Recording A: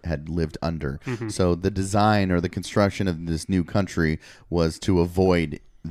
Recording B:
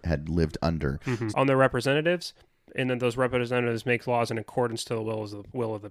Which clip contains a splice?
B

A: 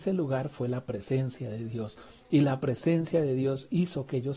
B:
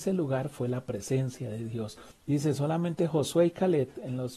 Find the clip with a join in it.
B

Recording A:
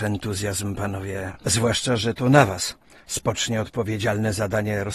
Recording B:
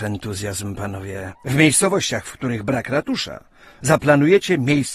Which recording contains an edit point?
B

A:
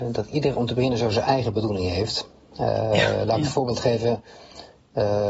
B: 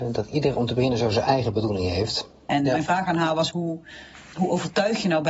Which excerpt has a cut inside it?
B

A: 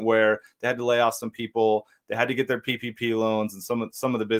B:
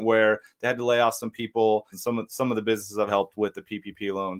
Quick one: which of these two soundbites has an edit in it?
B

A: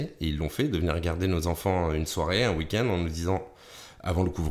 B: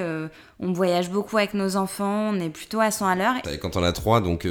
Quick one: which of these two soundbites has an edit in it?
B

